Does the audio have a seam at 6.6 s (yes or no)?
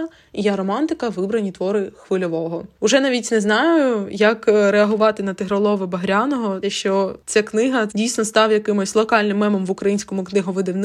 yes